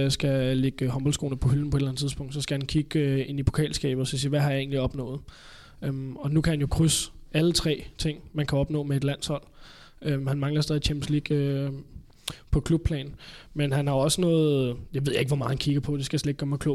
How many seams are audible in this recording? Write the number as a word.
zero